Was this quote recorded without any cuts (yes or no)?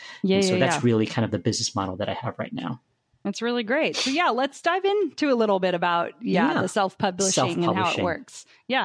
yes